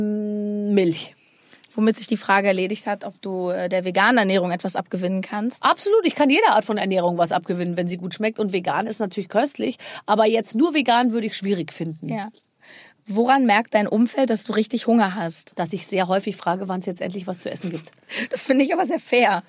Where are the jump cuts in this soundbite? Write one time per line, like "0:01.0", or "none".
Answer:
none